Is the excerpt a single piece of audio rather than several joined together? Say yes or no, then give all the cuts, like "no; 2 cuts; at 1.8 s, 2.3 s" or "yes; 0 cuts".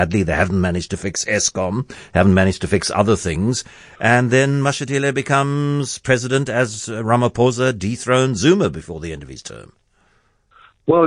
yes; 0 cuts